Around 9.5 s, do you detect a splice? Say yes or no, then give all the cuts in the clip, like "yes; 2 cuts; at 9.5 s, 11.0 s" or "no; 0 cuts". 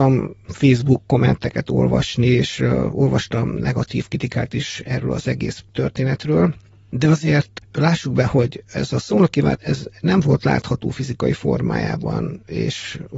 yes; 1 cut; at 9.5 s